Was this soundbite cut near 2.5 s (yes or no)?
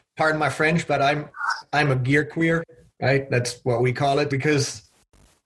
no